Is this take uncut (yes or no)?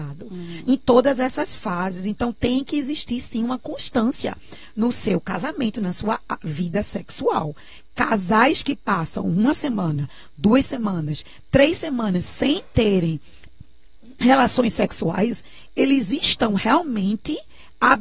yes